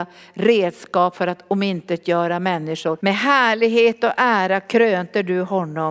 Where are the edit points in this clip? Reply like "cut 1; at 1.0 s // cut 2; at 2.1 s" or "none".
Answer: cut 1; at 3.0 s